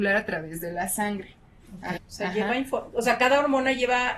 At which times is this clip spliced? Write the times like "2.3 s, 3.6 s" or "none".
2.0 s